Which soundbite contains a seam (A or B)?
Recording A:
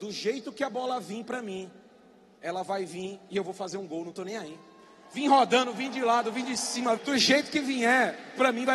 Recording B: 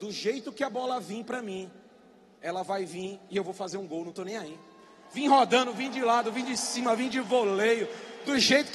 A